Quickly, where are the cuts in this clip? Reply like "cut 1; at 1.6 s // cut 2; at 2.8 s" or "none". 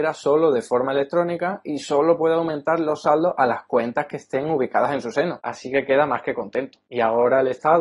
cut 1; at 5.4 s